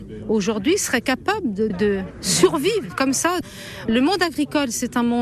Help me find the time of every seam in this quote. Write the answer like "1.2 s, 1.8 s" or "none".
1.7 s